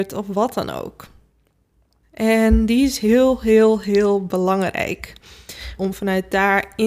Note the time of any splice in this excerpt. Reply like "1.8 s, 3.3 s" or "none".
2.0 s, 5.8 s